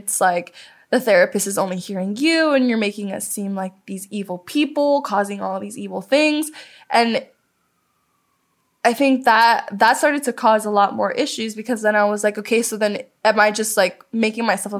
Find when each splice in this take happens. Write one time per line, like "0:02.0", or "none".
none